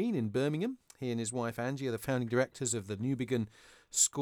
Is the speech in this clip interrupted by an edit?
no; 0 cuts

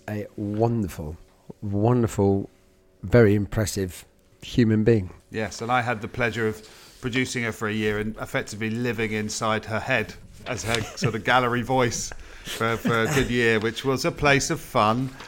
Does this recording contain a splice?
no; 0 cuts

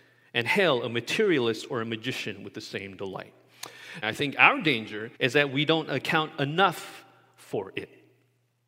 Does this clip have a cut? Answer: yes; 2 cuts; at 4.0 s, 5.2 s

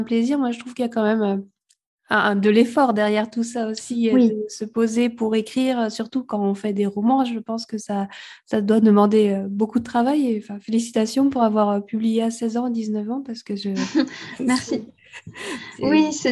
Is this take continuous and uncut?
yes; 0 cuts

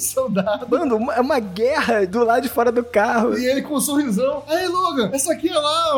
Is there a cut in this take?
no; 0 cuts

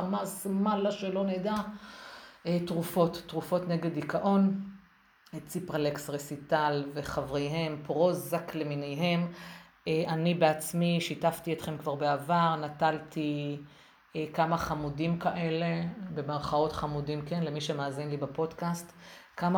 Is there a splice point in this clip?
no; 0 cuts

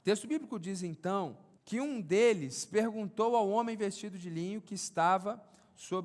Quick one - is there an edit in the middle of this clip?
yes; 1 cut; at 1.6 s

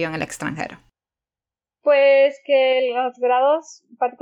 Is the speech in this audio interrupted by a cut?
no; 0 cuts

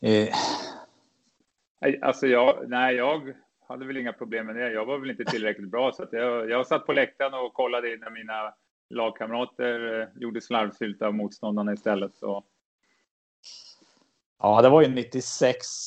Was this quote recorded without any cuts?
yes; 0 cuts

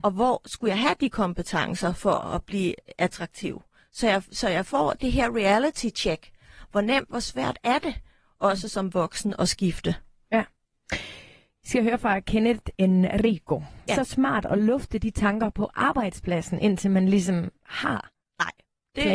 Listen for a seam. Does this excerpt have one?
yes; 2 cuts; at 12.7 s, 13.9 s

